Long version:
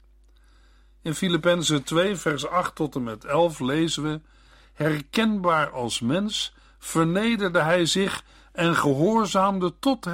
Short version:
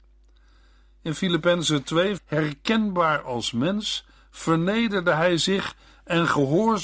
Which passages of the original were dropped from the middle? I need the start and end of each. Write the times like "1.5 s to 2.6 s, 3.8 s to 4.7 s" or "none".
2.2 s to 4.7 s